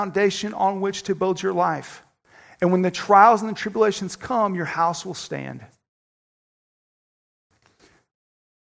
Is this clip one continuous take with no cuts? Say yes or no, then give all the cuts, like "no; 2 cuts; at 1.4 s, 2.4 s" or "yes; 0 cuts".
yes; 0 cuts